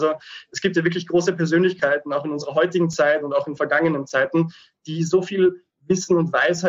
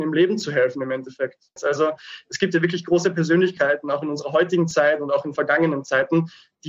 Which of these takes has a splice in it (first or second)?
second